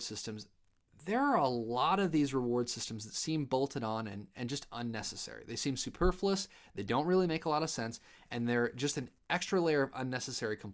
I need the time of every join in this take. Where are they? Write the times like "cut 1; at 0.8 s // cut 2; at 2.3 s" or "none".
none